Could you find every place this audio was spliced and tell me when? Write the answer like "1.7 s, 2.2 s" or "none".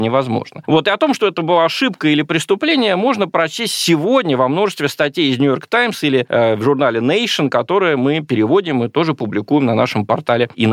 none